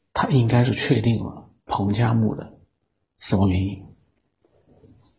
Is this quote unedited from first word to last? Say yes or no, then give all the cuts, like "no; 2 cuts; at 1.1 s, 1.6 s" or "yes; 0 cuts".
yes; 0 cuts